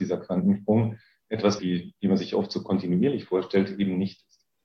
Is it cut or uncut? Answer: cut